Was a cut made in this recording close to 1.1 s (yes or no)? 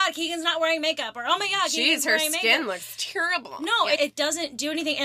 no